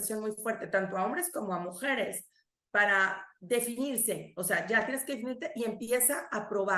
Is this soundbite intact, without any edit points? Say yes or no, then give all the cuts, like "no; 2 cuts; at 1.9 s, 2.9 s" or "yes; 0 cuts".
yes; 0 cuts